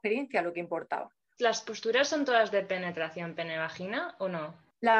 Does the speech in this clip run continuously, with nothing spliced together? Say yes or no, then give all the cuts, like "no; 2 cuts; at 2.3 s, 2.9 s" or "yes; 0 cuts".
no; 1 cut; at 1.4 s